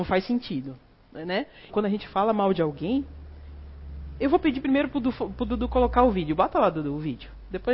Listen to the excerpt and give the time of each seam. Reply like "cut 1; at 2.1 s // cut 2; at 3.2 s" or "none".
cut 1; at 1.7 s